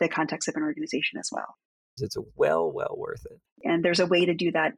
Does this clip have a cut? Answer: yes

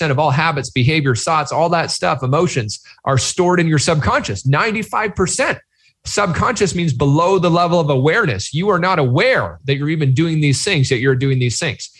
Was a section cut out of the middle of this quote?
no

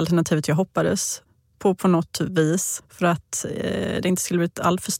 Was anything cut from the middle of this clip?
no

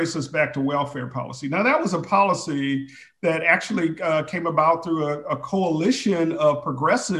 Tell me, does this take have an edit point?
no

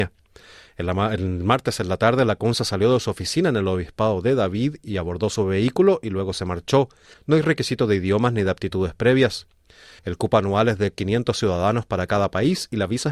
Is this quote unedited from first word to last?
no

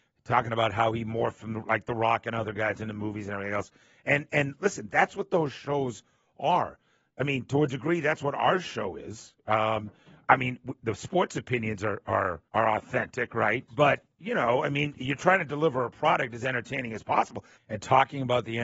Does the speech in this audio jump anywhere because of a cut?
yes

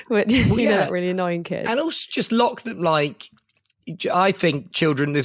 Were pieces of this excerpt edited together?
no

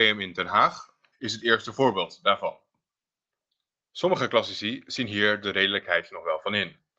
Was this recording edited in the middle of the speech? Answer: yes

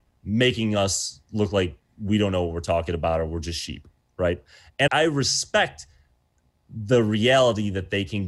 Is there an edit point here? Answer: yes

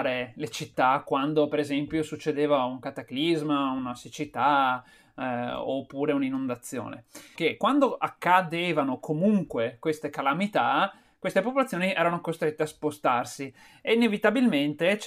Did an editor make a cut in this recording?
yes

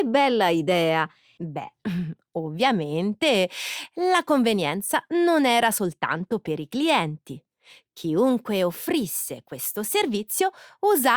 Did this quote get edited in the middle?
yes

